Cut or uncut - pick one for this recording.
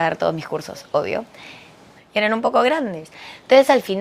cut